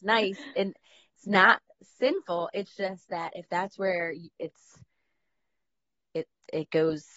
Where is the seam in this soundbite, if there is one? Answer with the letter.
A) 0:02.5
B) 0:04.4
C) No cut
B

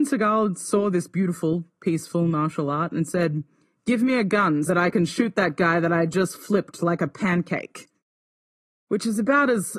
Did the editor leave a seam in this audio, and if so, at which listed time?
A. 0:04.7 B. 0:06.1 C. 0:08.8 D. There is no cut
A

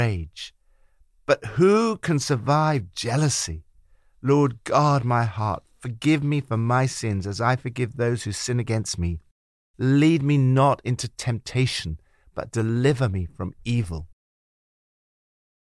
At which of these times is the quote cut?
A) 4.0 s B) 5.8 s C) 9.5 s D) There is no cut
D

